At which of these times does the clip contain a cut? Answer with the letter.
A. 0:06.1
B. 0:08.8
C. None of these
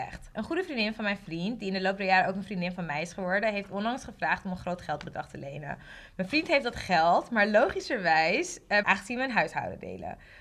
B